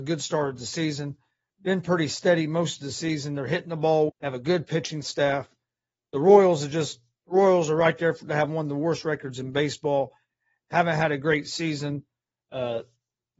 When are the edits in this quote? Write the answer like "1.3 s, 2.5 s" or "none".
4.1 s